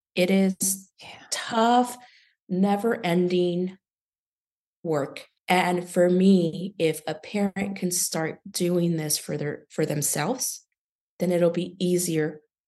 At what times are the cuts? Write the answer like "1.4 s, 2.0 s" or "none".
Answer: 5.4 s, 11.1 s